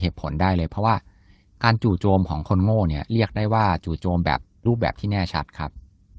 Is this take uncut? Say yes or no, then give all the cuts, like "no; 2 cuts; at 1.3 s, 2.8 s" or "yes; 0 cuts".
no; 1 cut; at 4.7 s